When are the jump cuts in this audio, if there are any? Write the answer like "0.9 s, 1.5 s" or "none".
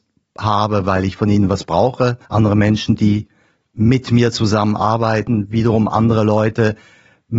2.2 s